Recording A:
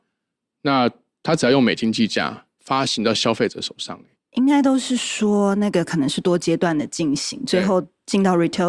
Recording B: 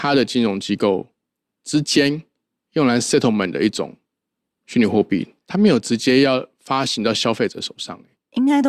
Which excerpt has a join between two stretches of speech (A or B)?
A